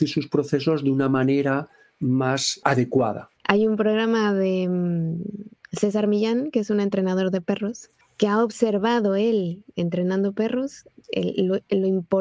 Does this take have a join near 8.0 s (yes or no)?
no